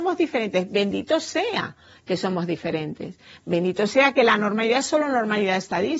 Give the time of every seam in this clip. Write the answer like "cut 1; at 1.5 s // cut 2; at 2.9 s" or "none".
none

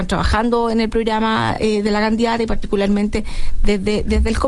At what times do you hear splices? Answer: none

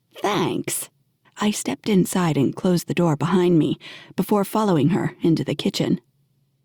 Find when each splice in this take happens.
cut 1; at 1.2 s

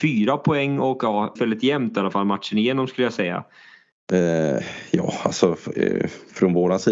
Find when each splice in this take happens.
cut 1; at 1.4 s // cut 2; at 3.9 s

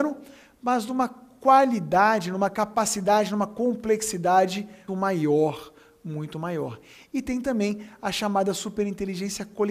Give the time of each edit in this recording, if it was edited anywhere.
cut 1; at 4.9 s

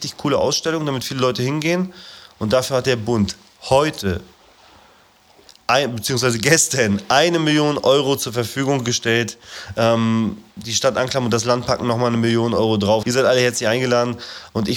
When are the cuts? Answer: cut 1; at 13.0 s

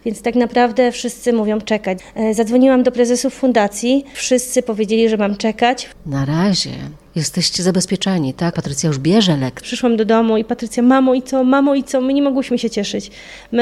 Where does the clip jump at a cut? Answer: cut 1; at 8.5 s // cut 2; at 9.6 s

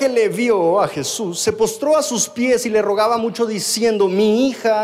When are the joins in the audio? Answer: none

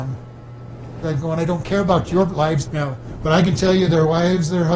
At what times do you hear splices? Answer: cut 1; at 1.0 s // cut 2; at 2.6 s

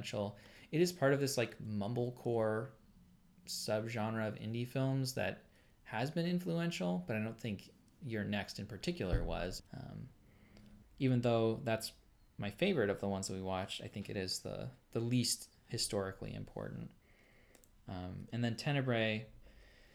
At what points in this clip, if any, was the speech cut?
cut 1; at 9.6 s // cut 2; at 10.8 s

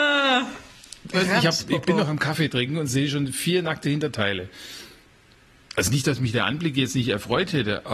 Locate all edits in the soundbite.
cut 1; at 1.1 s

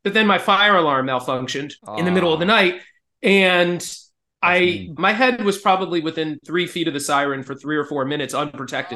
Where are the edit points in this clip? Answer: cut 1; at 1.8 s // cut 2; at 5.0 s

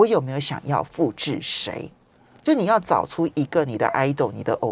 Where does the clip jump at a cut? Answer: none

